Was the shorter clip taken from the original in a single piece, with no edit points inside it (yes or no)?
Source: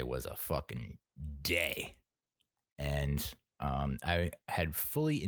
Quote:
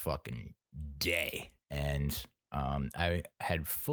no